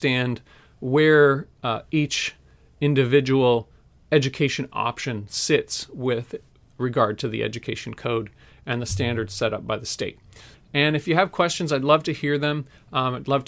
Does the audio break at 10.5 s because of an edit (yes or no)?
yes